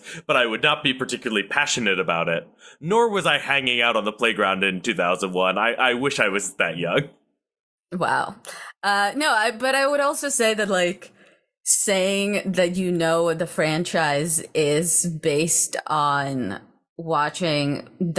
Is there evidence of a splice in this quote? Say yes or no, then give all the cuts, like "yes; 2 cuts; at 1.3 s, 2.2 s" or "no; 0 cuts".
no; 0 cuts